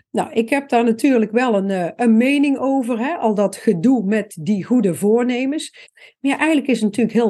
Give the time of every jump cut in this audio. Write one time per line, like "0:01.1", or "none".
0:05.8